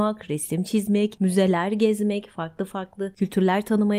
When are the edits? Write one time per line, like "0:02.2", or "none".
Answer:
none